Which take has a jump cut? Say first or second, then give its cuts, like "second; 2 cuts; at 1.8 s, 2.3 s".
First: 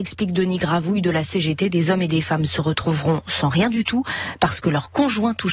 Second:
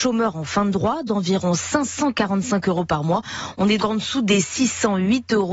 second; 1 cut; at 3.8 s